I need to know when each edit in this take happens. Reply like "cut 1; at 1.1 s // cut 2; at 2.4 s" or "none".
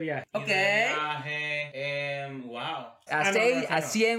cut 1; at 3.1 s